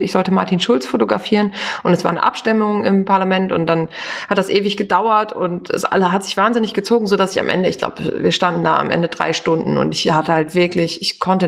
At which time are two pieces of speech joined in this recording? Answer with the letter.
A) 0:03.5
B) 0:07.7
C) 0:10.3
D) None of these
D